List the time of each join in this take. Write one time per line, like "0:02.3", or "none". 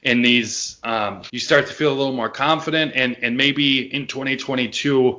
0:01.3